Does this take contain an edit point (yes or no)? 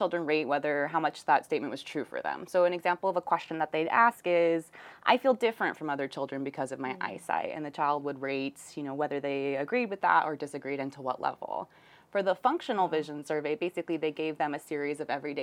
no